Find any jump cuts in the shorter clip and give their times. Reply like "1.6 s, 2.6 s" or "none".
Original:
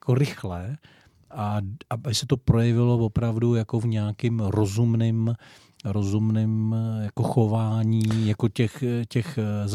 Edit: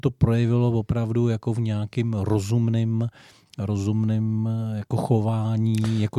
none